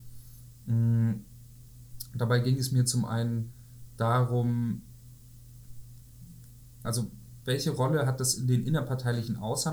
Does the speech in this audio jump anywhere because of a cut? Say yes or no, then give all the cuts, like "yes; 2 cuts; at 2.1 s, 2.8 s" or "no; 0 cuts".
yes; 1 cut; at 6.8 s